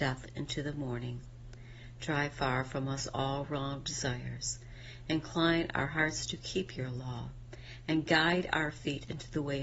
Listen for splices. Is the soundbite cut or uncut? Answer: uncut